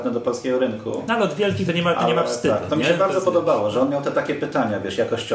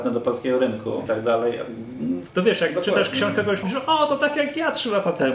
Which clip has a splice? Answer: second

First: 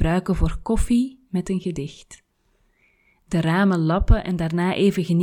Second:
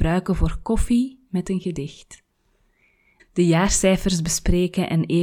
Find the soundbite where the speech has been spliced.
second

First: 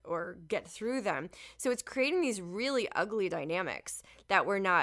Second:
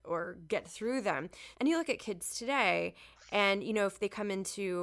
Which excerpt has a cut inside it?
second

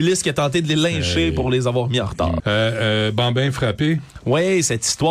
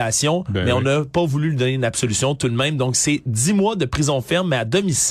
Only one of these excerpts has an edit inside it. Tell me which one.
first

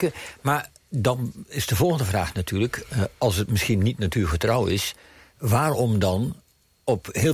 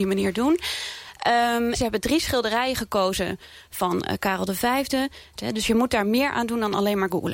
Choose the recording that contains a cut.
second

